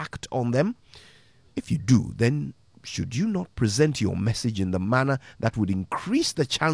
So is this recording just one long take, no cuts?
yes; 0 cuts

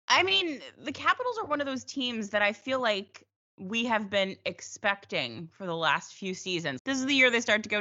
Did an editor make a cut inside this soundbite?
yes; 1 cut; at 6.8 s

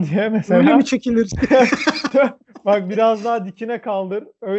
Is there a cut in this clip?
no; 0 cuts

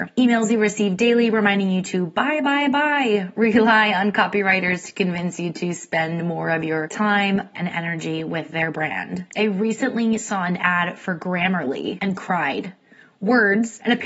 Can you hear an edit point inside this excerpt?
yes; 2 cuts; at 7.5 s, 9.3 s

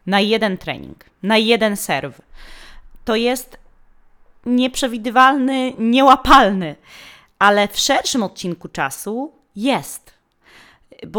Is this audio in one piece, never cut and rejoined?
yes; 0 cuts

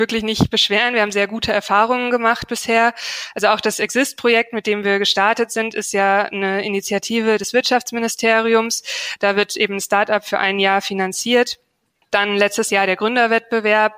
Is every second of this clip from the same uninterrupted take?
yes; 0 cuts

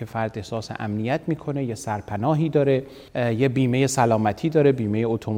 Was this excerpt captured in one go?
no; 1 cut; at 3.1 s

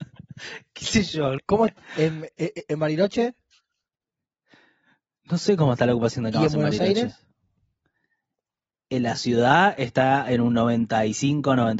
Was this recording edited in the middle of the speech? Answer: yes; 1 cut; at 1.4 s

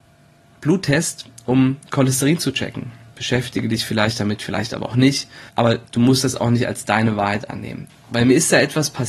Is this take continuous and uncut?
no; 3 cuts; at 3.1 s, 5.5 s, 7.9 s

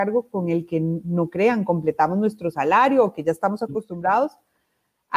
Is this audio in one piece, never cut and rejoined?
yes; 0 cuts

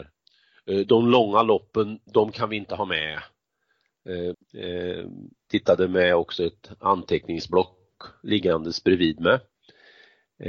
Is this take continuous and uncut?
no; 2 cuts; at 2.1 s, 4.3 s

